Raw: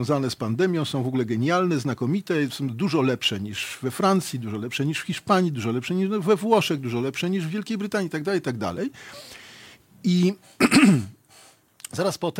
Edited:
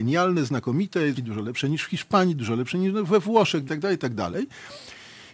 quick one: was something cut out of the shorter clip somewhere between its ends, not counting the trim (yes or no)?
yes